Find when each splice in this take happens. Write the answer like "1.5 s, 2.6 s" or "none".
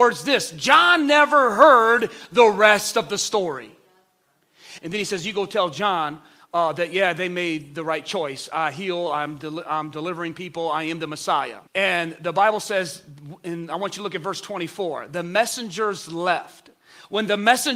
4.8 s, 11.7 s